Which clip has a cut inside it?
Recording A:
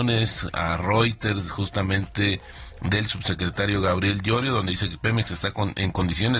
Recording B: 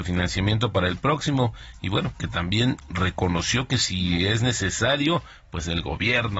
B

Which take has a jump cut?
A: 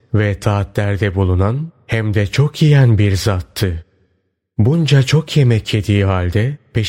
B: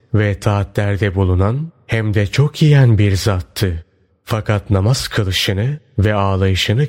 B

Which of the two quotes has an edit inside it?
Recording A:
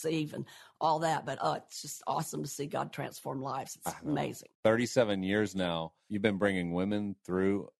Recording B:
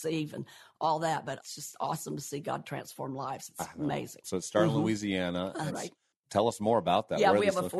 B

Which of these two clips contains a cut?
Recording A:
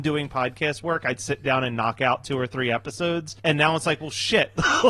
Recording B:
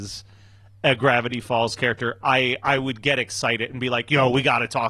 A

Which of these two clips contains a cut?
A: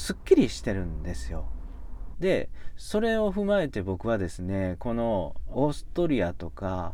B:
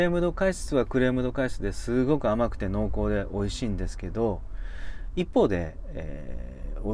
A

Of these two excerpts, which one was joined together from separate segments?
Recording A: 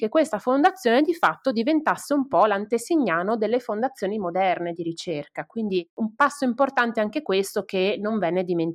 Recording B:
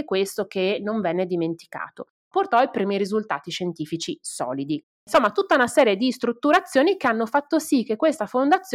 B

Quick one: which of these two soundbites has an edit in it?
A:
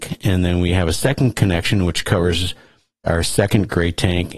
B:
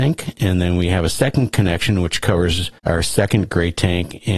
B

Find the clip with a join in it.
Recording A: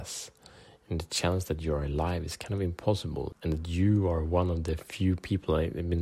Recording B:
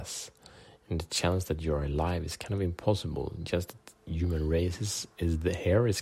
A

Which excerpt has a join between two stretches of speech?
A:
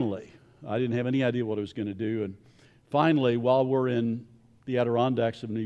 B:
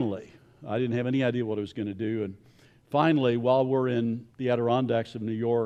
B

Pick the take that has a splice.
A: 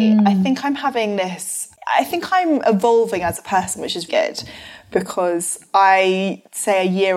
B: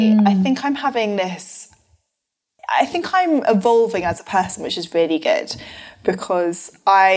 A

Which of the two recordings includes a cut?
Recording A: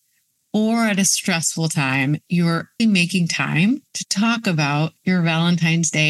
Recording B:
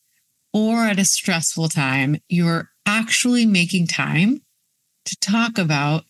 A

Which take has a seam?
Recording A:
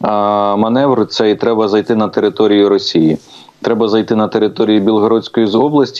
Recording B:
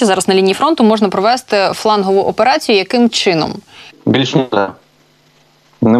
B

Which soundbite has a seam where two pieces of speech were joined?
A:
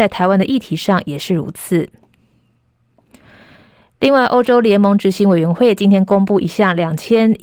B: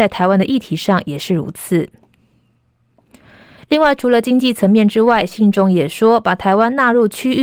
B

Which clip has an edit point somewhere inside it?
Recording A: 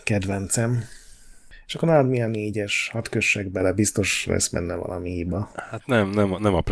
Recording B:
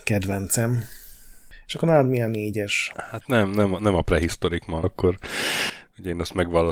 B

